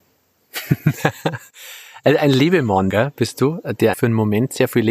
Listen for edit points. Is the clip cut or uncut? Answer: cut